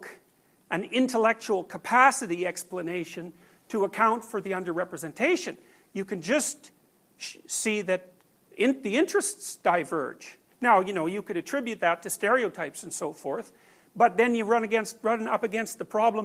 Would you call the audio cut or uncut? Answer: uncut